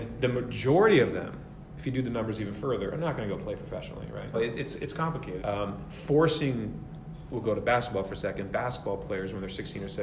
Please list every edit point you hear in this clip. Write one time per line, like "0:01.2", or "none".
0:04.3
0:05.4